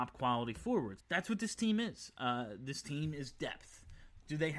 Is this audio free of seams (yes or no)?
no